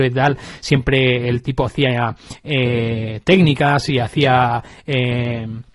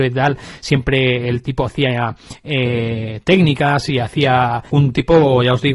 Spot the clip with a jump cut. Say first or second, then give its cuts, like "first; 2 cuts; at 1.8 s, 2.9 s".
second; 1 cut; at 4.7 s